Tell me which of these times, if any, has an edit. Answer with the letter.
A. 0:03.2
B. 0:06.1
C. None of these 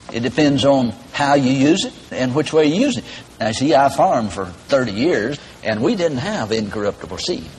A